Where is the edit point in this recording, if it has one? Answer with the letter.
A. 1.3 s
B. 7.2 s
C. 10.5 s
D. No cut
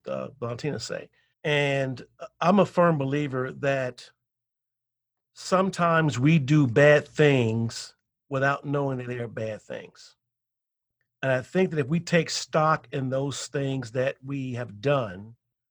A